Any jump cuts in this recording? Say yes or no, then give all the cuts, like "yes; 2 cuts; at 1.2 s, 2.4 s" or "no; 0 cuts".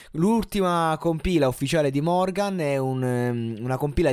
no; 0 cuts